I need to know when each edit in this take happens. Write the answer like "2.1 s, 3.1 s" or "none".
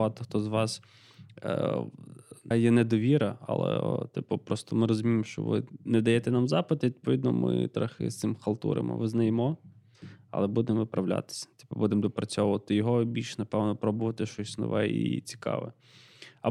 2.5 s